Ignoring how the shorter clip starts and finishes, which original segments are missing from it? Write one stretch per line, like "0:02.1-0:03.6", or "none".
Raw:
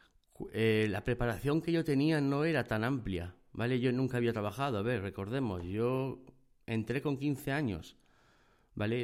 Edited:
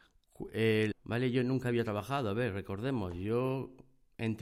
0:00.9-0:03.4

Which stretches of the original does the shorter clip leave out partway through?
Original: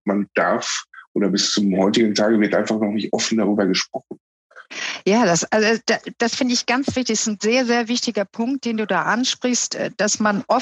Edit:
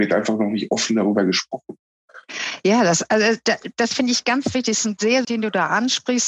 0:07.7-0:08.6

